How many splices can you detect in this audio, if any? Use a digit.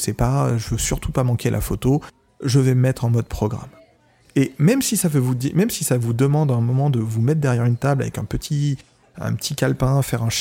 1